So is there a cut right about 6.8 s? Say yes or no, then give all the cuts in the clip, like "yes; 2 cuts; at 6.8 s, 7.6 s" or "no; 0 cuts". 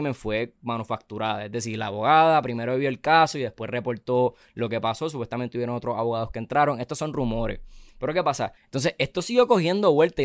no; 1 cut; at 8.6 s